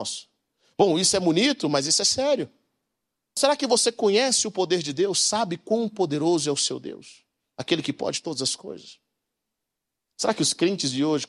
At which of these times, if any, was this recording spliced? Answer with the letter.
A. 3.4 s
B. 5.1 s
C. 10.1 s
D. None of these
A